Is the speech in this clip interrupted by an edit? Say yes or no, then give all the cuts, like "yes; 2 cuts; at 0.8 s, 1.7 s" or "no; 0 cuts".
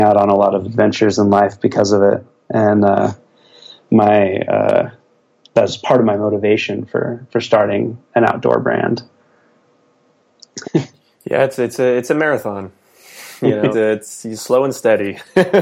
yes; 2 cuts; at 10.6 s, 13.7 s